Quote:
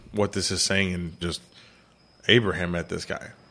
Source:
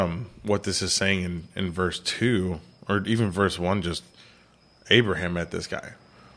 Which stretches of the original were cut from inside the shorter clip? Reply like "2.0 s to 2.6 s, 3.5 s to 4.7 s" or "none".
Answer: 1.5 s to 3.8 s